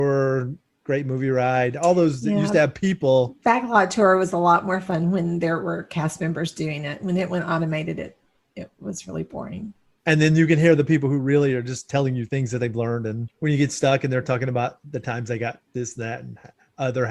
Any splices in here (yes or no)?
yes